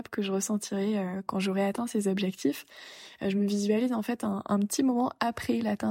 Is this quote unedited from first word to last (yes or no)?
no